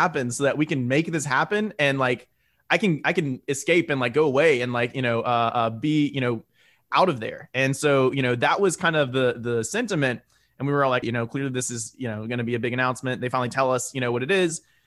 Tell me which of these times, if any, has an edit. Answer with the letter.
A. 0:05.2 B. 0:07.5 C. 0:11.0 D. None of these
C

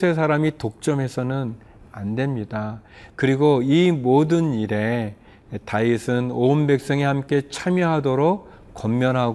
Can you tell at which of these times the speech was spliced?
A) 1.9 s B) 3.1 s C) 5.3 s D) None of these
B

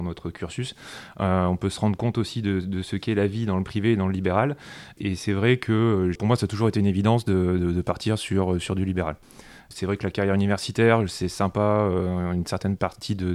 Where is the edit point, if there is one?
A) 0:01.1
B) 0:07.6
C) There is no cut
C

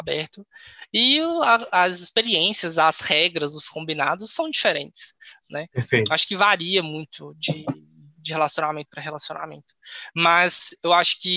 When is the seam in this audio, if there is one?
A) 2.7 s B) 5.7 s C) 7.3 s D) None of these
D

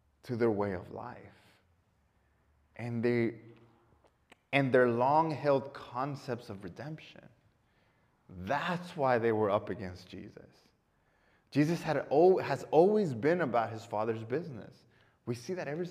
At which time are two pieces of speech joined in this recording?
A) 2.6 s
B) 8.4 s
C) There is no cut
C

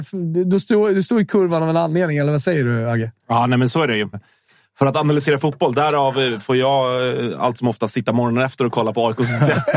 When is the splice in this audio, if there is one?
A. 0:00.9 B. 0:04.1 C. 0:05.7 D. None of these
B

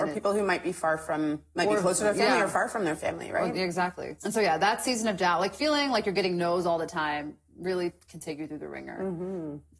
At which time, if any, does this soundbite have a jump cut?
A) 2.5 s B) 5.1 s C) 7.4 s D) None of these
D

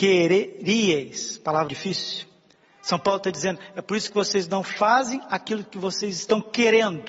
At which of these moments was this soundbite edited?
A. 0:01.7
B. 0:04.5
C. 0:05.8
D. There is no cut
A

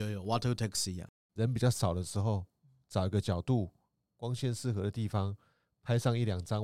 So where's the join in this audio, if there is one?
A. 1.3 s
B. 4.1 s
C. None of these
A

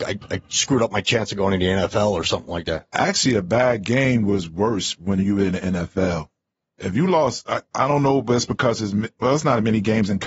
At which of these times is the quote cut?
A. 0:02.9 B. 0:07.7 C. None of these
C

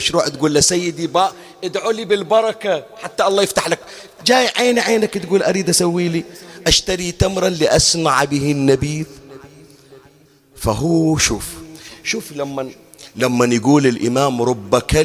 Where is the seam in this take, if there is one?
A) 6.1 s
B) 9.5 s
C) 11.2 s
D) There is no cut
D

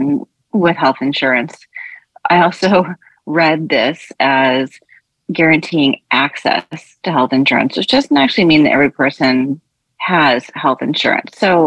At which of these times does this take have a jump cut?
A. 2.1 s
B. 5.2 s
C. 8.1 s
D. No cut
D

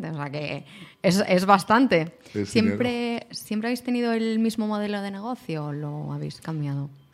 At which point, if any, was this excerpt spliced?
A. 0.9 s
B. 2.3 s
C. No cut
C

